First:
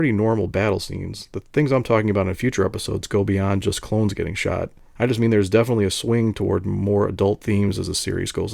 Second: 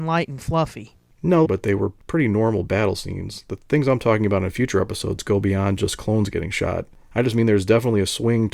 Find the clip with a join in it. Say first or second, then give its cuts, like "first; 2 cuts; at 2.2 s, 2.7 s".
second; 1 cut; at 1.4 s